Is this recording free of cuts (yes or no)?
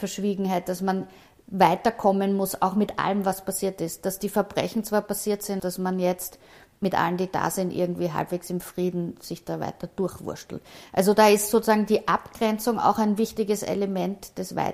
no